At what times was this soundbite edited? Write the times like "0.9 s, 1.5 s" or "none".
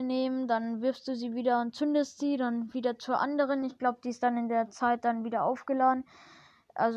none